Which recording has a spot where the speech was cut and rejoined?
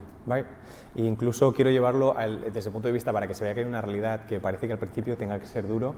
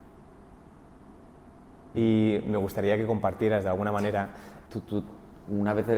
second; 2 cuts; at 1.9 s, 4.7 s

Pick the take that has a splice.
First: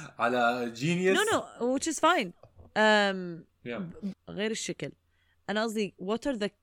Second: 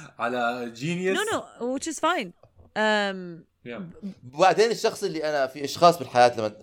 first; 1 cut; at 4.1 s

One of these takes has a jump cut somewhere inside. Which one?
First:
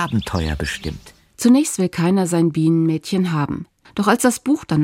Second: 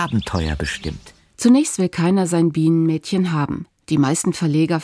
first; 1 cut; at 3.8 s

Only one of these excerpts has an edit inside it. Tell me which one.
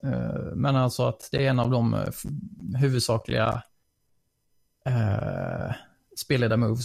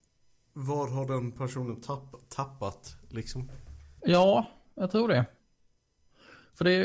second; 1 cut; at 4.0 s

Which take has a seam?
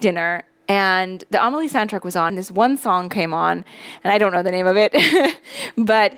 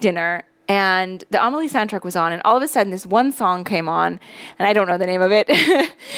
first; 1 cut; at 2.3 s

